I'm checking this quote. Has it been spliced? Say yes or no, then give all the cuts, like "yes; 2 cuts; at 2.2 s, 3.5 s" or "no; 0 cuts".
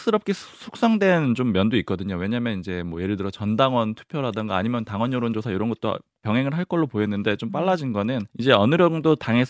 yes; 1 cut; at 8.3 s